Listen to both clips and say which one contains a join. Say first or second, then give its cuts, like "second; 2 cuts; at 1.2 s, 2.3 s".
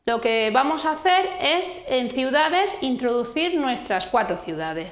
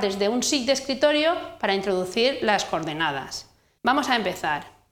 second; 1 cut; at 3.8 s